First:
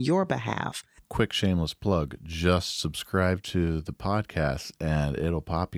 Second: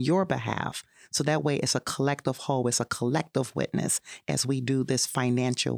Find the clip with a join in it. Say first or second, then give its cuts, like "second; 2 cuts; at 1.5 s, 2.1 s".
first; 1 cut; at 1.0 s